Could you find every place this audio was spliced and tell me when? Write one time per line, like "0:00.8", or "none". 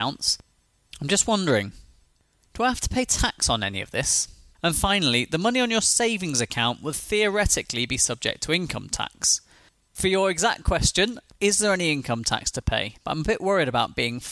0:04.5
0:09.9
0:13.0